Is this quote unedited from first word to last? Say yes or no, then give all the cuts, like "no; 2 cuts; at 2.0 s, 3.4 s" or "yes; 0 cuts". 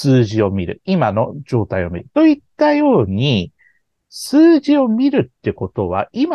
no; 1 cut; at 2.1 s